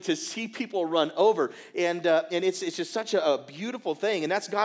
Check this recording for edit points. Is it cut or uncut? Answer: uncut